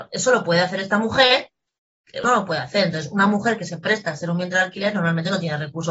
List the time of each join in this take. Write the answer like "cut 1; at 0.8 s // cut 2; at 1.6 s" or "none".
cut 1; at 2.2 s